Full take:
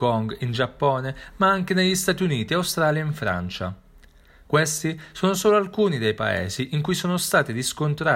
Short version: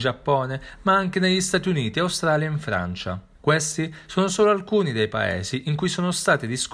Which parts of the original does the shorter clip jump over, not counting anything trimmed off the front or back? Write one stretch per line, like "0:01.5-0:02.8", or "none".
0:03.9-0:04.4